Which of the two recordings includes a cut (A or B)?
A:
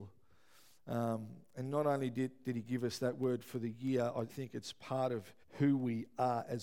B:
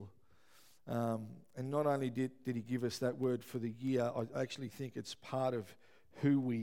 A